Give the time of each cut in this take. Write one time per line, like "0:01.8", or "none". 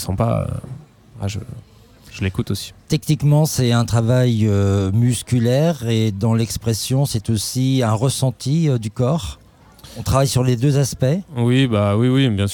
none